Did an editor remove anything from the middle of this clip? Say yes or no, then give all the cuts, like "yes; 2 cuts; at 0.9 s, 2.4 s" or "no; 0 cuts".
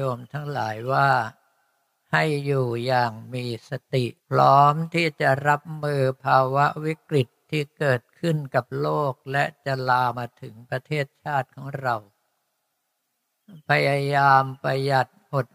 yes; 2 cuts; at 4.2 s, 10.1 s